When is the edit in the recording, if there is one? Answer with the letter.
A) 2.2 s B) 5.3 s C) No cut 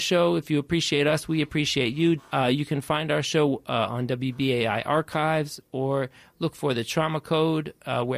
A